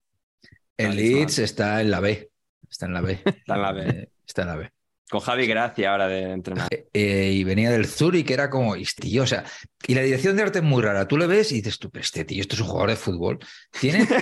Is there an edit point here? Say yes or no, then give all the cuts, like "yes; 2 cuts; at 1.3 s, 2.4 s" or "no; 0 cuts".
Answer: yes; 2 cuts; at 6.7 s, 9.0 s